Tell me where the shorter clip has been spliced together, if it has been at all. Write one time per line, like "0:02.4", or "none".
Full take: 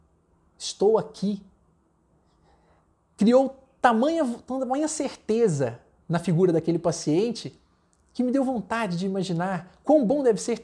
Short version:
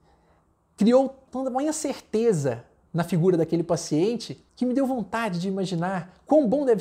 0:01.3
0:04.5